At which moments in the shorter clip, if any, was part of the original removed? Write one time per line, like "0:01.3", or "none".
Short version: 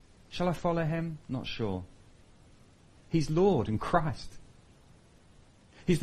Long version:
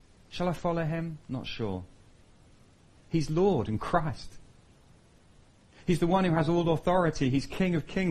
none